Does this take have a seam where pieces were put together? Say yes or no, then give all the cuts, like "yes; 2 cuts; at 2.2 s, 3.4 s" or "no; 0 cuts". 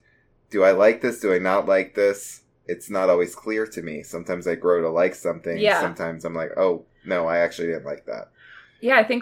no; 0 cuts